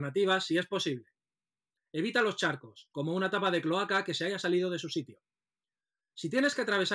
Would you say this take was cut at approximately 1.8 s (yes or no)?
yes